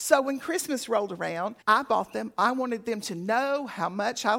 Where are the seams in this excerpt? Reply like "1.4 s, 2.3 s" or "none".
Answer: 1.6 s